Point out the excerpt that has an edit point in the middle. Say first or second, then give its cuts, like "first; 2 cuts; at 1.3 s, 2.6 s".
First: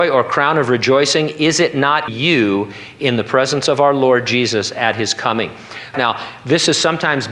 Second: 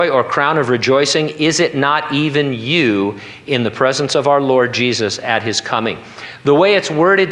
first; 2 cuts; at 2.1 s, 5.9 s